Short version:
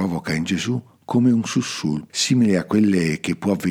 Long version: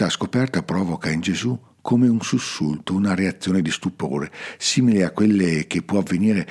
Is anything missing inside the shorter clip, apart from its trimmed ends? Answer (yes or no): yes